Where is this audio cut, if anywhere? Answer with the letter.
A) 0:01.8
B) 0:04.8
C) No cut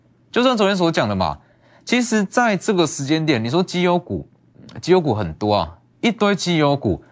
C